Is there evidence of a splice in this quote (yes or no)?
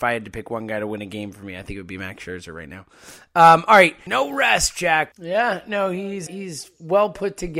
yes